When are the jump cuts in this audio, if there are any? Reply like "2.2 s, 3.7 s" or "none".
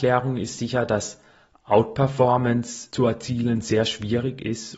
none